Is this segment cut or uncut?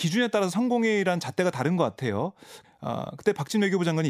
cut